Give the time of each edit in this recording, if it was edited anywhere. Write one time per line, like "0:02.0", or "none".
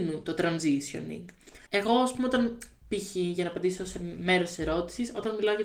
0:01.7